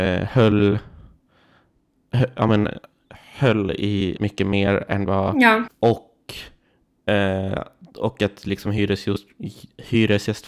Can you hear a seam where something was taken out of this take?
yes; 2 cuts; at 4.2 s, 5.7 s

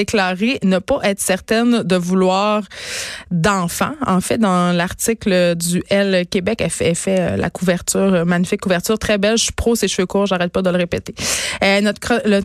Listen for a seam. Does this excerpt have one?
no; 0 cuts

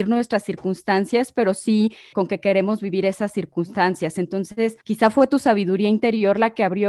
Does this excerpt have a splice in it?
yes; 2 cuts; at 2.1 s, 4.8 s

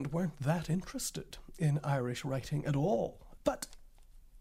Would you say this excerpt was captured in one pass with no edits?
no; 1 cut; at 3.4 s

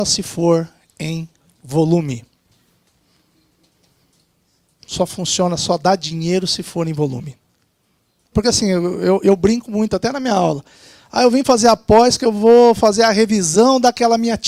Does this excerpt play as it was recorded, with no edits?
no; 1 cut; at 8.3 s

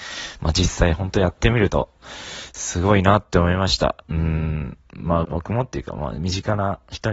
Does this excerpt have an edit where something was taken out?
yes; 2 cuts; at 4.0 s, 5.2 s

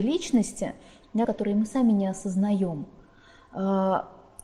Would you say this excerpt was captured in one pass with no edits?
no; 1 cut; at 1.2 s

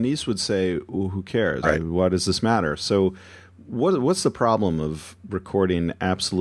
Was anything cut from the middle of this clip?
yes; 1 cut; at 1.6 s

